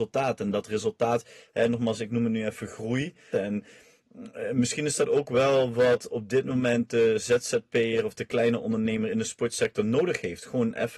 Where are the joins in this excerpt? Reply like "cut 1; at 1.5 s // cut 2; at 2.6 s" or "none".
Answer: cut 1; at 3.3 s